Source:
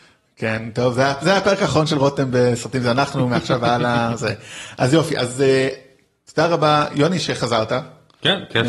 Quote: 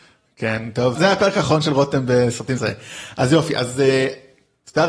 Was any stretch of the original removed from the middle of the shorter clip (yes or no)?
yes